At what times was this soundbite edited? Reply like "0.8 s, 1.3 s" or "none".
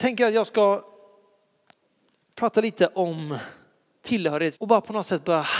4.5 s